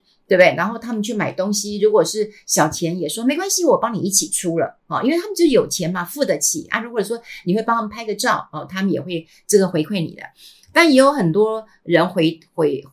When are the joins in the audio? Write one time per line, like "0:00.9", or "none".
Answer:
none